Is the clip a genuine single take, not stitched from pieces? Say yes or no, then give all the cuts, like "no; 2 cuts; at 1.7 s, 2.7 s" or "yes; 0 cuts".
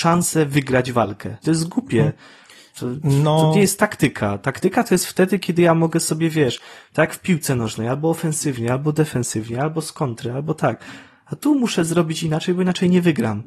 no; 1 cut; at 1.4 s